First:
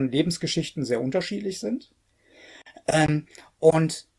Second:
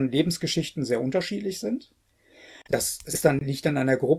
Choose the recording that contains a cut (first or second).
second